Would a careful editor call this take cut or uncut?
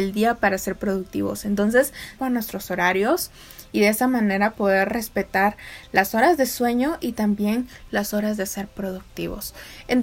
cut